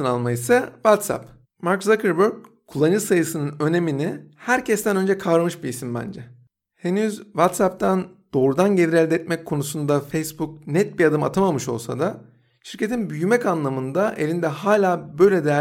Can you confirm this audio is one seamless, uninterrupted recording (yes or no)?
no